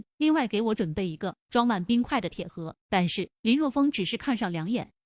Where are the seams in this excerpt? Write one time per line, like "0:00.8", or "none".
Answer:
0:02.8